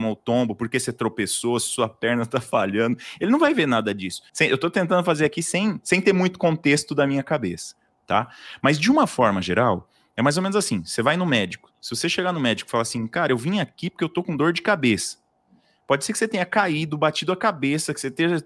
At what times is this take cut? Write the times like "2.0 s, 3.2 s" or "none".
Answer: 4.3 s